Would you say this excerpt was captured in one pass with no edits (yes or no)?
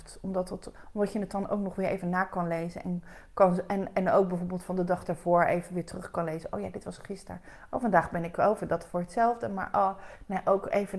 yes